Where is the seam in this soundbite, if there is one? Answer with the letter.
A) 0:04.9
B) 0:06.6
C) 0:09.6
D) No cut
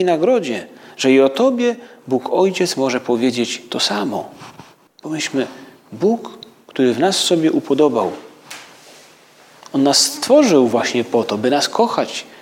A